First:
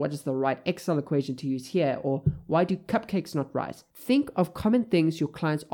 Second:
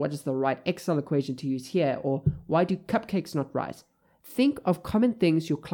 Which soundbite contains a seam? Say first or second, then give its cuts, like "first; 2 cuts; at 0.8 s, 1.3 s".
first; 1 cut; at 3.9 s